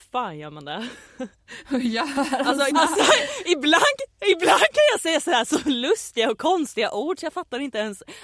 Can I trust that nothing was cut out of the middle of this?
no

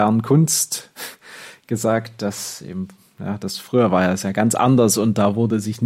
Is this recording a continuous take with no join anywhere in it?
no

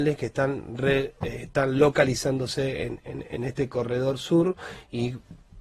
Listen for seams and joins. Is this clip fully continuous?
yes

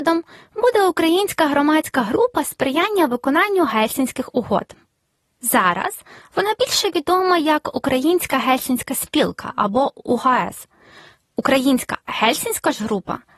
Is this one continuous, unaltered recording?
yes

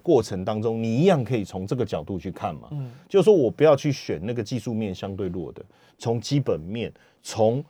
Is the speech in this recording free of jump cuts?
no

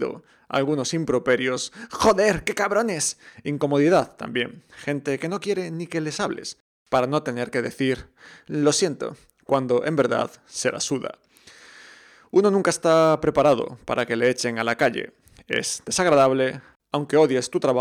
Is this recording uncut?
yes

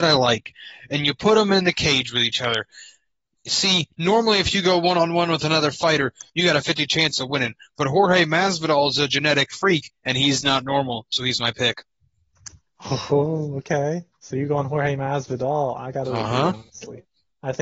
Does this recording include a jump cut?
yes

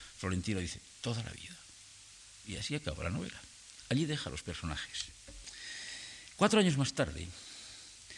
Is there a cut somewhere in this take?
no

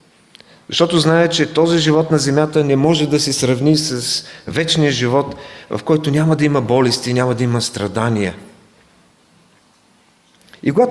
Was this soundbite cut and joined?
no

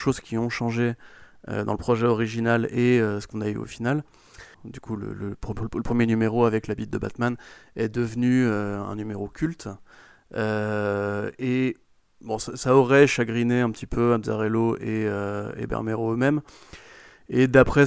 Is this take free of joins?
no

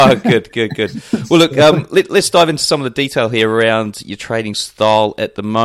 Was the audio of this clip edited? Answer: no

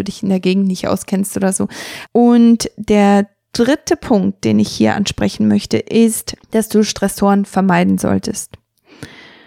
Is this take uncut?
no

